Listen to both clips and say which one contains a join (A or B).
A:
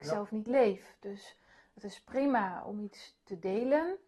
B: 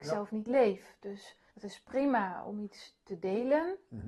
B